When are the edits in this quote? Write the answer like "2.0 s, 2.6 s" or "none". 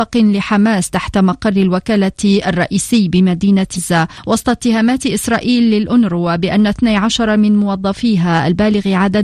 3.8 s